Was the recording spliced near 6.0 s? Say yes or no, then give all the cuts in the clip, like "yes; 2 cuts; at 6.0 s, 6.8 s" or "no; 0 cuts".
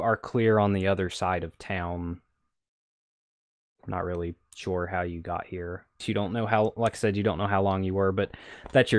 yes; 1 cut; at 6.0 s